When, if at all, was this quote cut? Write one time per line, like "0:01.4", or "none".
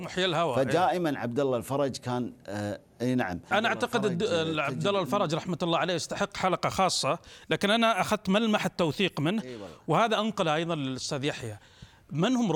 0:03.5